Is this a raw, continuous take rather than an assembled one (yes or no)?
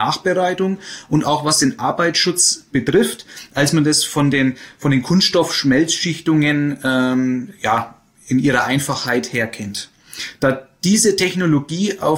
yes